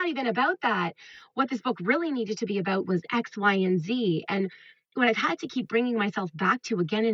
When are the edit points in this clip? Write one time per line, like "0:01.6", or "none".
none